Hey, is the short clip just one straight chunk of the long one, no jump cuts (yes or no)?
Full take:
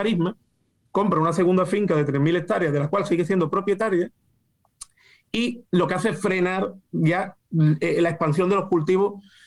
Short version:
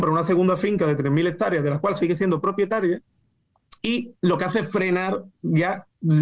no